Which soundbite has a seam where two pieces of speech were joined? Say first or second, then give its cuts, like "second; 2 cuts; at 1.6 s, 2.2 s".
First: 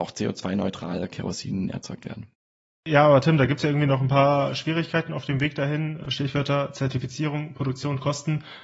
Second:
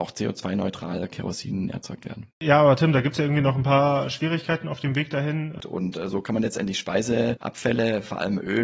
second; 2 cuts; at 2.3 s, 5.6 s